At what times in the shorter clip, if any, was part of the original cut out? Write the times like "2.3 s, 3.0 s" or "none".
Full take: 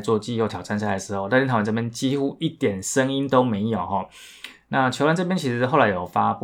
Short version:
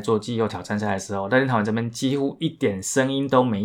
none